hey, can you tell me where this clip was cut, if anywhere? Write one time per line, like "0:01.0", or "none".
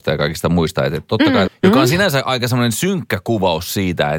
0:01.5